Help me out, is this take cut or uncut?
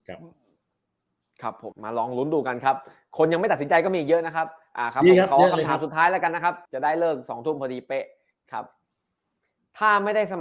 cut